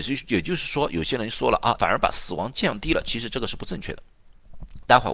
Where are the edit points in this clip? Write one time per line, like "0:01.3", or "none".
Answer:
0:01.8